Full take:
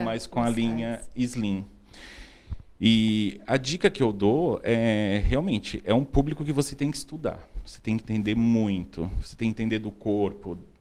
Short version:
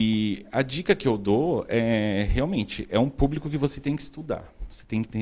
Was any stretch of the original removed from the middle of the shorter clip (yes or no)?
no